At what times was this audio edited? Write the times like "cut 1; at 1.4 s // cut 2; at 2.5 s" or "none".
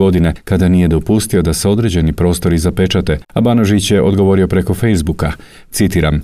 cut 1; at 3.2 s